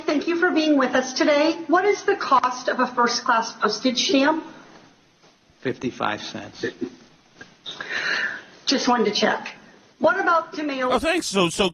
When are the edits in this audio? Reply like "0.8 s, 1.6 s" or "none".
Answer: none